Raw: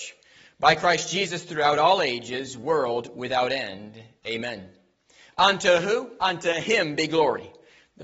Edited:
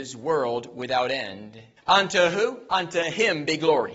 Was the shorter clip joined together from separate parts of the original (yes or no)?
yes